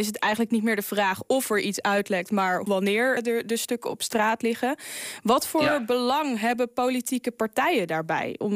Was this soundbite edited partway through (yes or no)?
yes